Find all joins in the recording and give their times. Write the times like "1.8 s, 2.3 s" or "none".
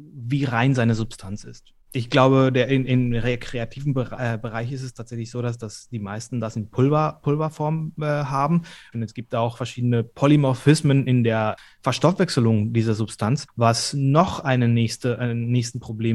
8.9 s